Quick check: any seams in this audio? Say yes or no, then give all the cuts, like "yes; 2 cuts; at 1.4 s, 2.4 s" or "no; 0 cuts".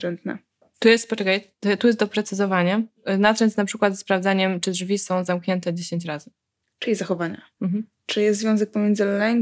no; 0 cuts